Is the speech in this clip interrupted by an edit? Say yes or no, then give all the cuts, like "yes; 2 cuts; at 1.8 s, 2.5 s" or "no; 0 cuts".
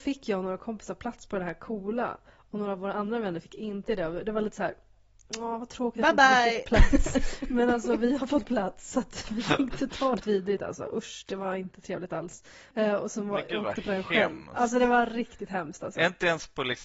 yes; 2 cuts; at 10.2 s, 12.7 s